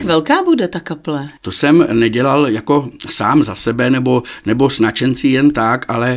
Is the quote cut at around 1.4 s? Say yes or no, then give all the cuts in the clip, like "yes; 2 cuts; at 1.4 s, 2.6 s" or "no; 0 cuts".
yes; 1 cut; at 1.4 s